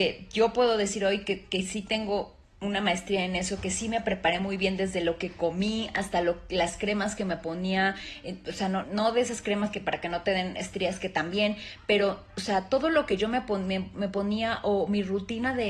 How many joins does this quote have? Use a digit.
1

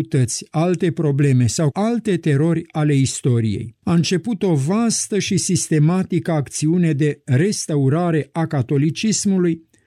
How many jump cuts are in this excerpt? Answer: 2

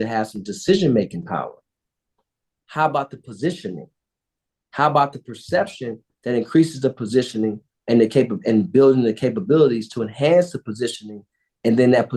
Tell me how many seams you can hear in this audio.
1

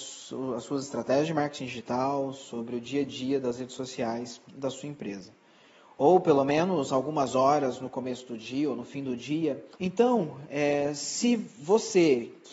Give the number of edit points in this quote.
1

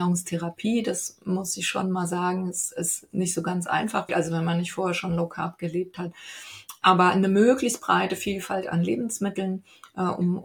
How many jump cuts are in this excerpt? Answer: 1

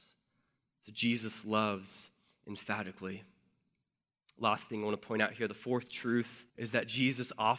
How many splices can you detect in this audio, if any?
1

